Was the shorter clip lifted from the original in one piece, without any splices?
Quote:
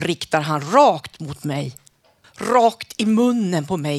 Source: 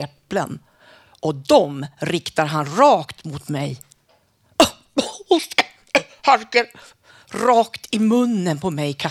no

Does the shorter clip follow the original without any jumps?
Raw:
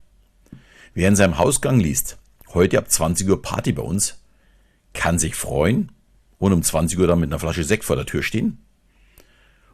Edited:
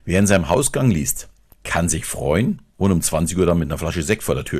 no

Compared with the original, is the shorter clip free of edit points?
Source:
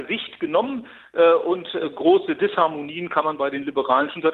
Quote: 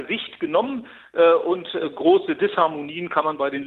yes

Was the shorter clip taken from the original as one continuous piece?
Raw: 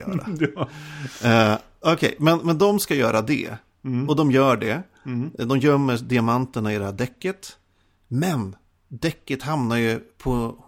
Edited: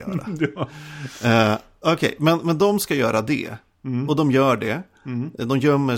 yes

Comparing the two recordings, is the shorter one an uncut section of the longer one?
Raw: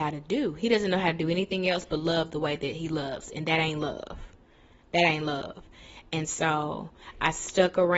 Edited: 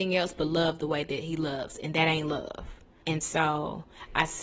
no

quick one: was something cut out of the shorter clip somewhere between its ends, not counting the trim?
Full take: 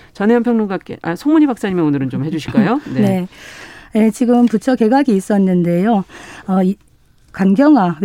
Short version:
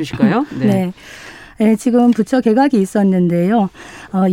no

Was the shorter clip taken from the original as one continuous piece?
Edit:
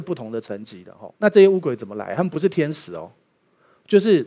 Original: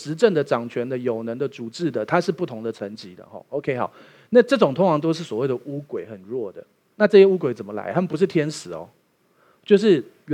no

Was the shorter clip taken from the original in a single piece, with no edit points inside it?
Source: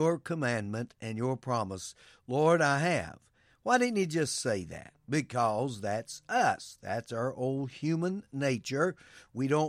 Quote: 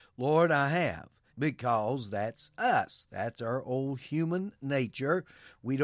no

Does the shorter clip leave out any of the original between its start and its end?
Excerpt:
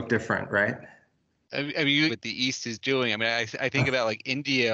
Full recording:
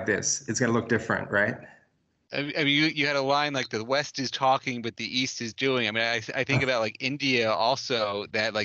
yes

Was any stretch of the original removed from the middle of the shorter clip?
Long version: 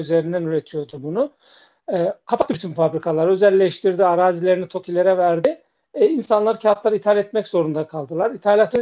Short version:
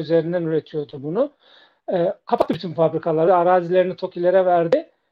yes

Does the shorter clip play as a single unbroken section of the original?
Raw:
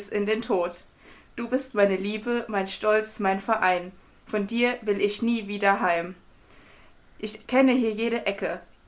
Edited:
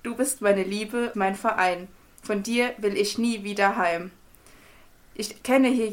no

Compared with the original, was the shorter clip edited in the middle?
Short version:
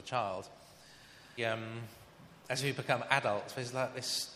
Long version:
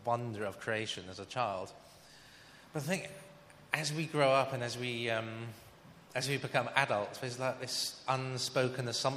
yes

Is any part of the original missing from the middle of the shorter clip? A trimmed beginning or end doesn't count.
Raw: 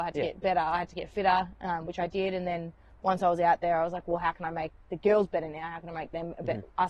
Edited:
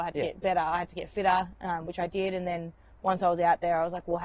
no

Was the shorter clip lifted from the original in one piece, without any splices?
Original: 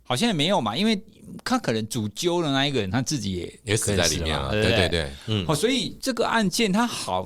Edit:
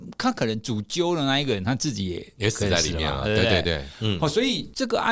yes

